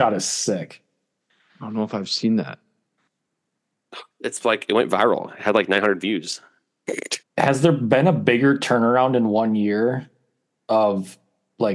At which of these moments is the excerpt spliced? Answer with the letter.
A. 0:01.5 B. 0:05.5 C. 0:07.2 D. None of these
C